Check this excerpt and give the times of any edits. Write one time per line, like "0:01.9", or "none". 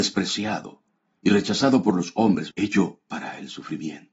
0:02.5